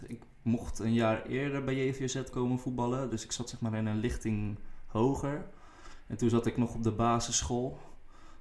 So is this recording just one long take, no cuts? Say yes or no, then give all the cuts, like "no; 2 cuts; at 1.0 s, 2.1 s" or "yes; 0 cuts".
no; 1 cut; at 2.3 s